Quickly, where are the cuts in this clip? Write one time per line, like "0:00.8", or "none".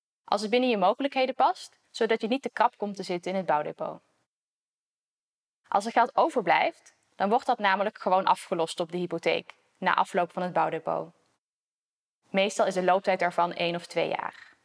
0:01.8